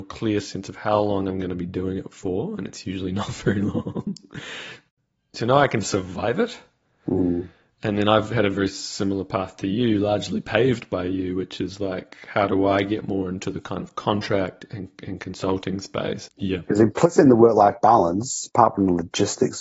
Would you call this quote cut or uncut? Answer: cut